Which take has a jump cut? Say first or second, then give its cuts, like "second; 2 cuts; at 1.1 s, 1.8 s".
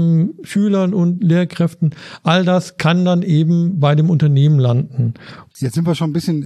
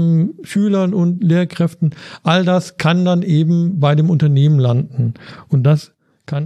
first; 1 cut; at 5.5 s